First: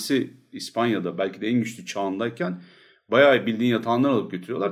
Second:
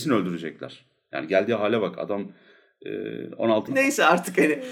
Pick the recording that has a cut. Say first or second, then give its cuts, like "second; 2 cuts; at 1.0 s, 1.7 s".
second; 1 cut; at 3.7 s